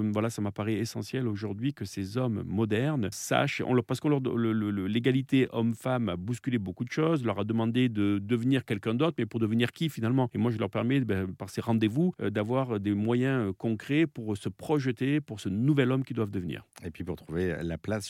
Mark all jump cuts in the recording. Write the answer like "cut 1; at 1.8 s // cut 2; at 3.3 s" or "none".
none